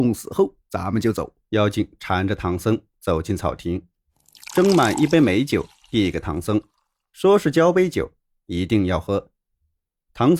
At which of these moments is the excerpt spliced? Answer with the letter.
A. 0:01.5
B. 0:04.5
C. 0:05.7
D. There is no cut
A